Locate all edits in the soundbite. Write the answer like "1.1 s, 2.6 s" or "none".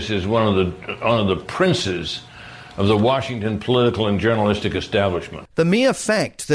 5.5 s